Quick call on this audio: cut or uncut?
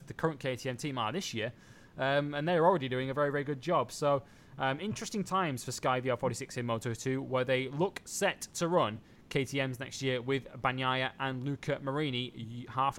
uncut